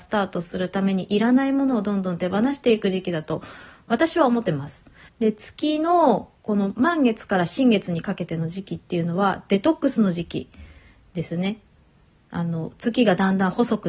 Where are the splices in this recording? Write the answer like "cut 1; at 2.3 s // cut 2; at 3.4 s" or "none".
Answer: cut 1; at 5.1 s

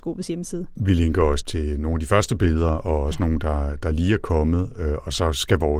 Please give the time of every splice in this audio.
cut 1; at 1.4 s

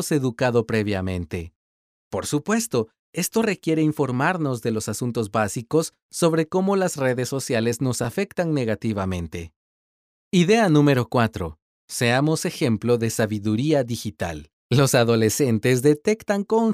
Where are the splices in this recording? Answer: cut 1; at 14.6 s

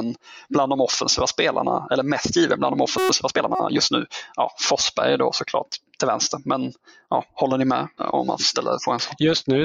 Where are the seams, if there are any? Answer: cut 1; at 8.0 s

